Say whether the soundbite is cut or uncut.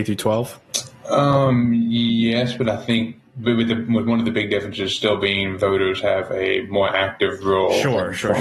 uncut